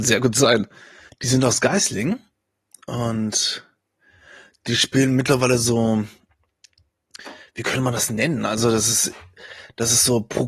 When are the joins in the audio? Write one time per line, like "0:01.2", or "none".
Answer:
0:01.1